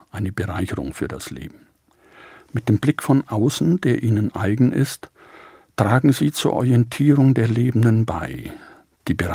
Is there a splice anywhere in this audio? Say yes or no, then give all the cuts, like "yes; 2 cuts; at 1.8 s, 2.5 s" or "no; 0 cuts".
no; 0 cuts